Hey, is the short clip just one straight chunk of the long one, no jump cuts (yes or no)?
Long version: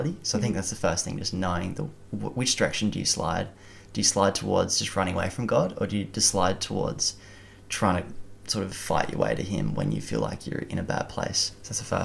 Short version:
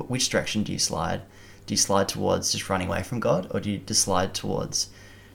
yes